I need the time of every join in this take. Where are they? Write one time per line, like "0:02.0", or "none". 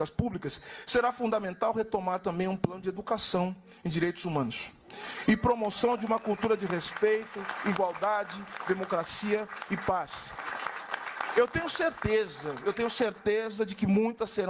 none